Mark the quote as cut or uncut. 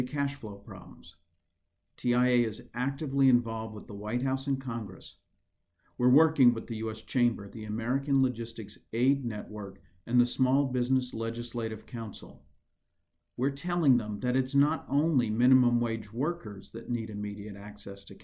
uncut